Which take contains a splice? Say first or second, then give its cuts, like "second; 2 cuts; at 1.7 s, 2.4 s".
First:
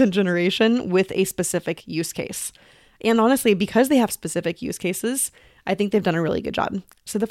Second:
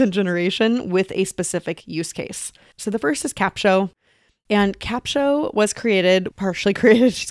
second; 2 cuts; at 2.7 s, 6.3 s